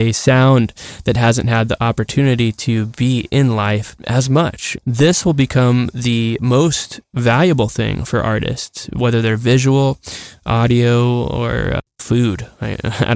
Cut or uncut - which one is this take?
cut